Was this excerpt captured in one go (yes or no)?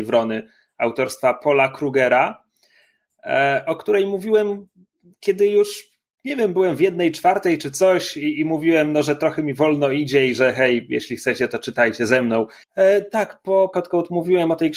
no